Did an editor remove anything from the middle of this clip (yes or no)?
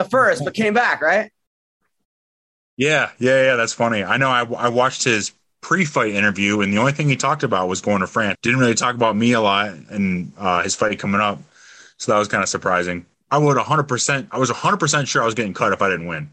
yes